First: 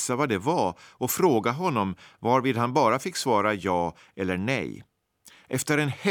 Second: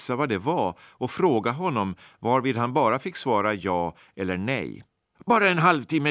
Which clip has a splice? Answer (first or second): second